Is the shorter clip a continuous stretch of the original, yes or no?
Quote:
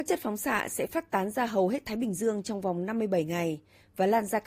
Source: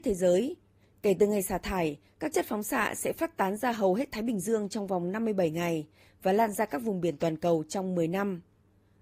yes